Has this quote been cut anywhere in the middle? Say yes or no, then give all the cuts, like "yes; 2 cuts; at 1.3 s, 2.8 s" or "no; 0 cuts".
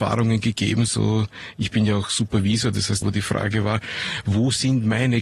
yes; 1 cut; at 3.0 s